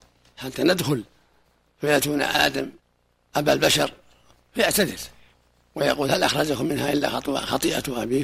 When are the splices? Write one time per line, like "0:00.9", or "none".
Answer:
none